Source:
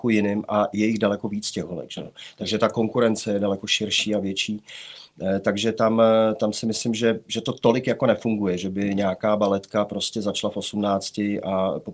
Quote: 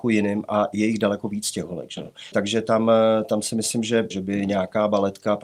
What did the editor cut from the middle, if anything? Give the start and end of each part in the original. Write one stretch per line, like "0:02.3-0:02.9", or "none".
0:02.3-0:05.4
0:07.2-0:08.6